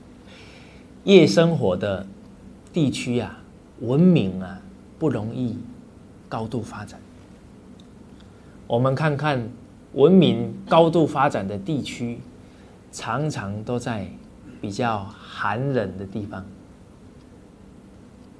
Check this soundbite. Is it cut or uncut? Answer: uncut